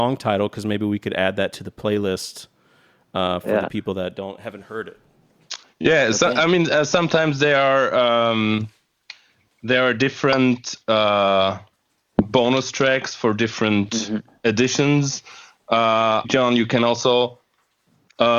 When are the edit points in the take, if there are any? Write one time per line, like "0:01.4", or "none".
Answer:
0:16.2